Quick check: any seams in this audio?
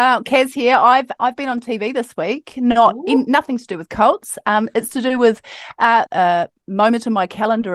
yes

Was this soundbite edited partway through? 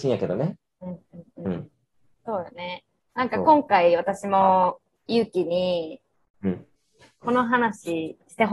yes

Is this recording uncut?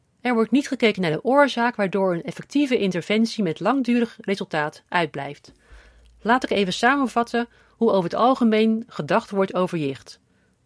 yes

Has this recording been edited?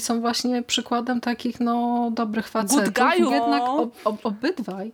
yes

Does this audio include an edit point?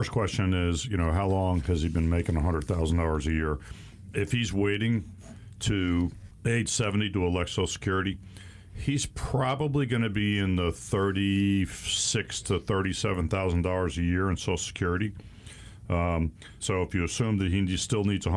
yes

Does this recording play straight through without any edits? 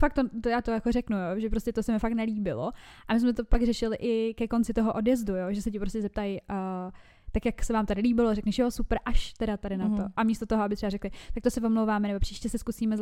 yes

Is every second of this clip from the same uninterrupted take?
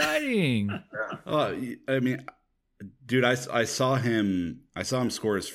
yes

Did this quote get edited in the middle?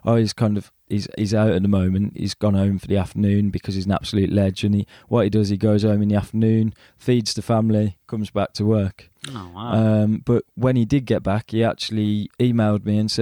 no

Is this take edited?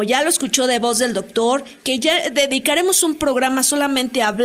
yes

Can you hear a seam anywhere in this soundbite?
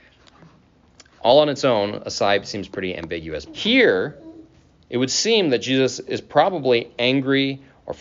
yes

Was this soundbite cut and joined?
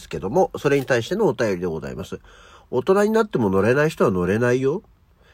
no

